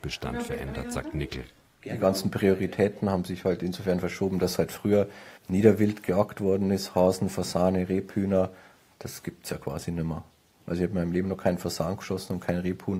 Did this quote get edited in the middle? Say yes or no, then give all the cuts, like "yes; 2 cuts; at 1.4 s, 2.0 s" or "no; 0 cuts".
yes; 1 cut; at 5.4 s